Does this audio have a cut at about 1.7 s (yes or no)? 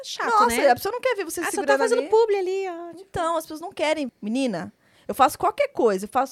no